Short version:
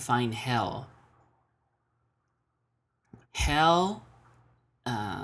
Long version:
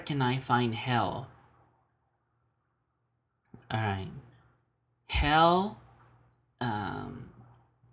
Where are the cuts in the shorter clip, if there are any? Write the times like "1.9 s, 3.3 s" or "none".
3.2 s

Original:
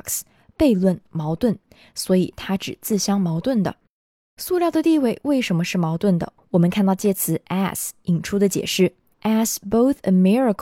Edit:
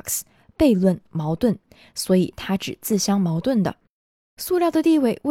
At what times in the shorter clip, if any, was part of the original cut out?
none

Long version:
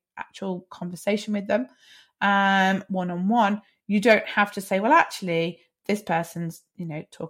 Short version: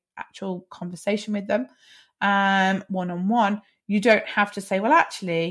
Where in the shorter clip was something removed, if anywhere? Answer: none

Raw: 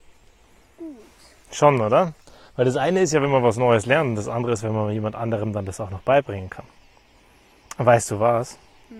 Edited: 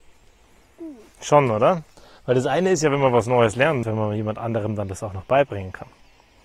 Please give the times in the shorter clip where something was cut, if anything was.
1.1 s, 3.8 s

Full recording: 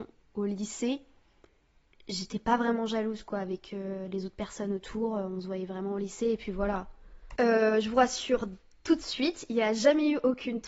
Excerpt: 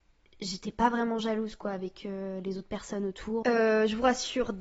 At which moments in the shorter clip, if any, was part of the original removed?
3.4 s

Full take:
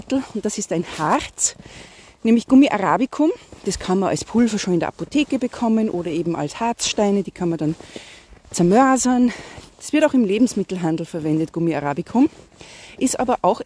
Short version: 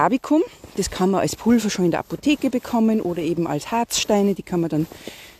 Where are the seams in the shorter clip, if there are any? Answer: none

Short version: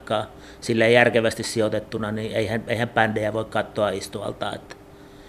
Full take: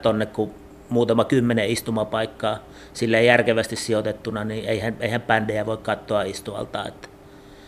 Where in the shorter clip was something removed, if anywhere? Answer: none

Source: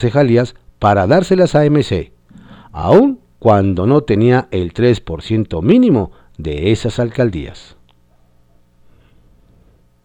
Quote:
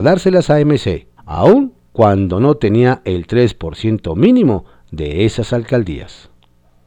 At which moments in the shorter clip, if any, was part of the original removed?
1.2 s

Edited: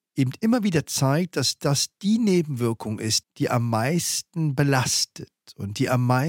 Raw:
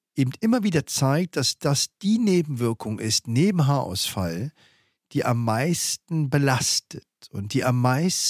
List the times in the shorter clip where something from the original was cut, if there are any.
3.2 s

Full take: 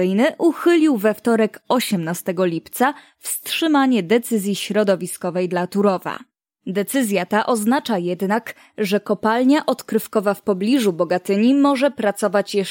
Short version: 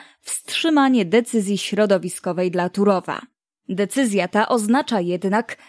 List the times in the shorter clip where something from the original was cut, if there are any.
none

